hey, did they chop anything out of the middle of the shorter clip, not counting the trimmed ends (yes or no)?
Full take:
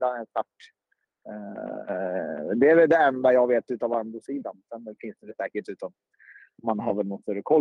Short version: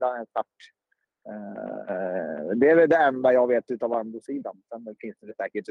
no